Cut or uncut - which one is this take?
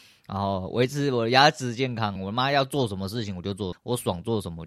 cut